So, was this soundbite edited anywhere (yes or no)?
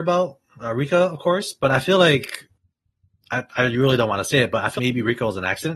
yes